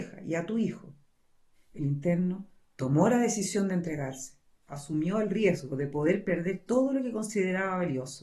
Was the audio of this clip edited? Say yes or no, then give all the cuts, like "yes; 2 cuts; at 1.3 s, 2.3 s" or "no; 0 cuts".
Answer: no; 0 cuts